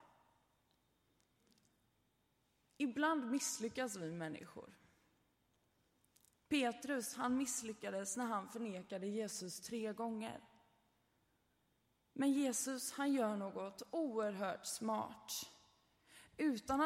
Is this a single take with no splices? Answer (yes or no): yes